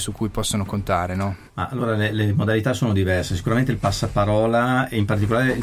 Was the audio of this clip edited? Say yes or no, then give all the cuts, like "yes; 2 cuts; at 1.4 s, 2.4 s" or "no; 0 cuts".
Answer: yes; 1 cut; at 1.5 s